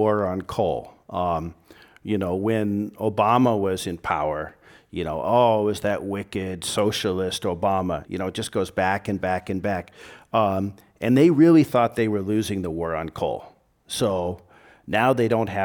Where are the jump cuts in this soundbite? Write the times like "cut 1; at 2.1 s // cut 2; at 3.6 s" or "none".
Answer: cut 1; at 8.0 s